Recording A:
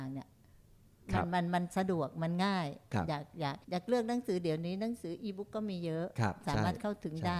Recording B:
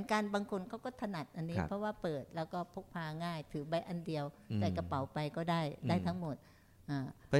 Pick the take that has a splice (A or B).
A